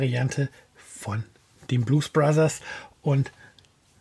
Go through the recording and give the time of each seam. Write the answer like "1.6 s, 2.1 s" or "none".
none